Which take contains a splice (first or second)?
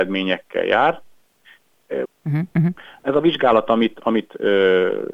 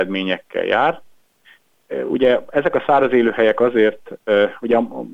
first